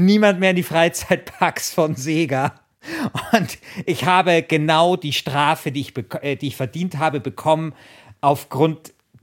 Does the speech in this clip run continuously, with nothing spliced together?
yes; 0 cuts

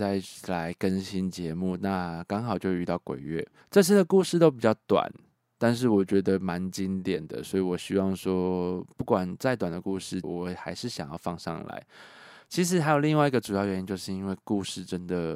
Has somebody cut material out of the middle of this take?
yes; 2 cuts; at 3.6 s, 10.2 s

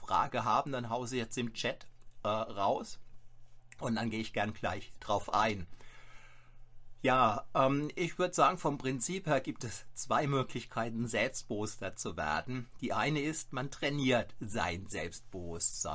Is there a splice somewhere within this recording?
no; 0 cuts

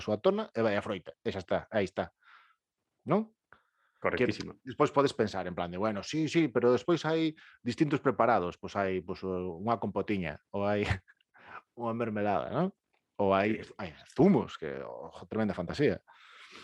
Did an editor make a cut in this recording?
no; 0 cuts

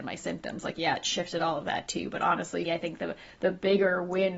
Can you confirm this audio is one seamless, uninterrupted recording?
no; 1 cut; at 2.7 s

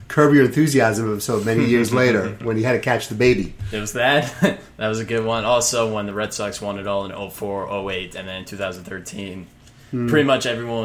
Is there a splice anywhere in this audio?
no; 0 cuts

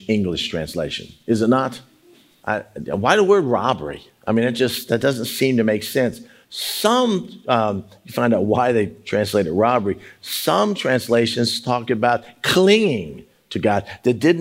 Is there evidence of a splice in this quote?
no; 0 cuts

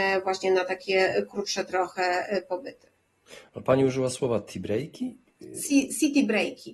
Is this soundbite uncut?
yes; 0 cuts

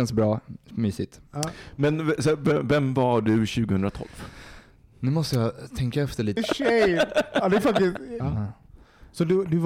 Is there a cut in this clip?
yes; 2 cuts; at 6.4 s, 8.2 s

